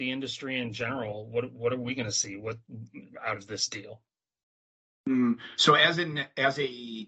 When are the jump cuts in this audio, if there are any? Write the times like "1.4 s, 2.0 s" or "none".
none